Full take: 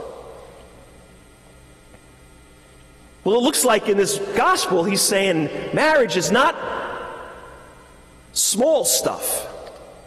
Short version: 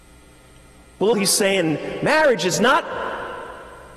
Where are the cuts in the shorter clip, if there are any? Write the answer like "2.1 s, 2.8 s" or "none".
1.1 s